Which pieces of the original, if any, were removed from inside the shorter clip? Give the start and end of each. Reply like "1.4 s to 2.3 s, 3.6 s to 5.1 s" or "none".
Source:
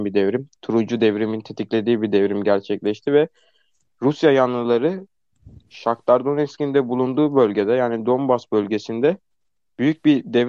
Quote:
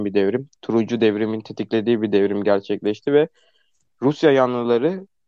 none